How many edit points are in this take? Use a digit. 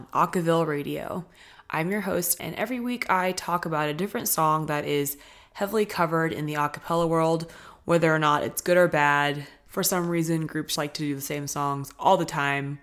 2